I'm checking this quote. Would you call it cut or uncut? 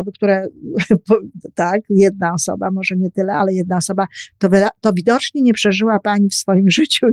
uncut